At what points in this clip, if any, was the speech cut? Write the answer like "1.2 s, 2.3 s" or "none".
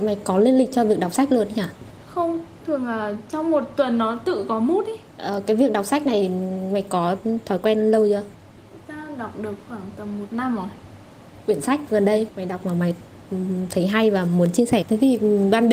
5.1 s, 14.8 s